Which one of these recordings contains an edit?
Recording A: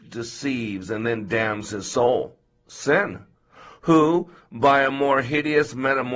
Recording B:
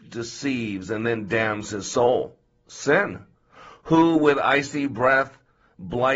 A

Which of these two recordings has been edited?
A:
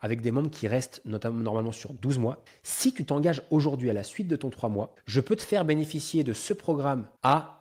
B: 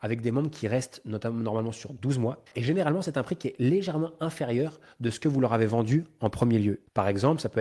B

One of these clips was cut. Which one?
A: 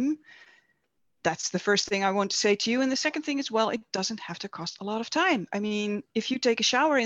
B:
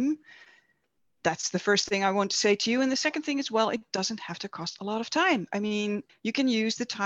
B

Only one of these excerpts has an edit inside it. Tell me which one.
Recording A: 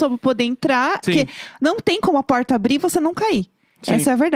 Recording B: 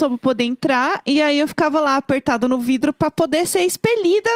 A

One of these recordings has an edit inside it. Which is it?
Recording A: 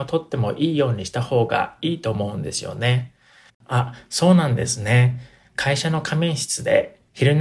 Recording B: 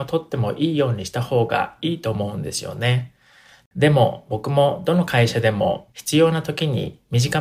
A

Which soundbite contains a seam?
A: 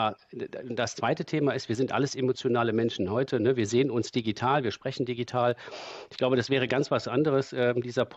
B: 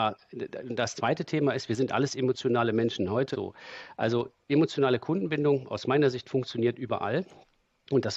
B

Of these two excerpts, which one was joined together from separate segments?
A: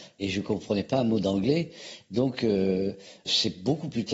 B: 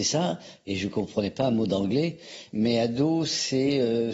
B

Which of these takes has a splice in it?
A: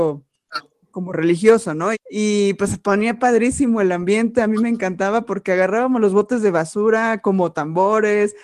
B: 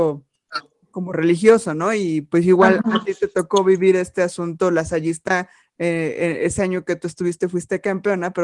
A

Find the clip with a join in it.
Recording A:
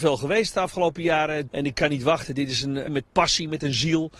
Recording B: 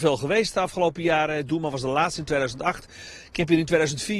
A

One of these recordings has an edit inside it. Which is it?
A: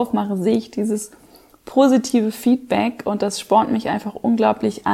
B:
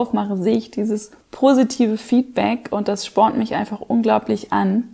B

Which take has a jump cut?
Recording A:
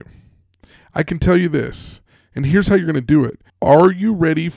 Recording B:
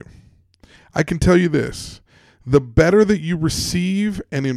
A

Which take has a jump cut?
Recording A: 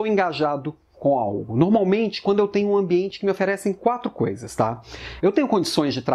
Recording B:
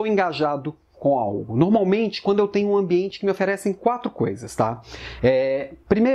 A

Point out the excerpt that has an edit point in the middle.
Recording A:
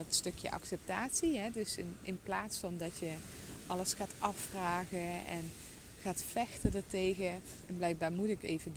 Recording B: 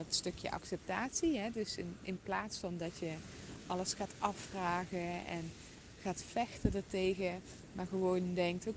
A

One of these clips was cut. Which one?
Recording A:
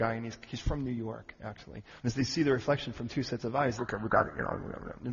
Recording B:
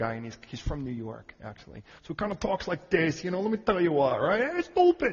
A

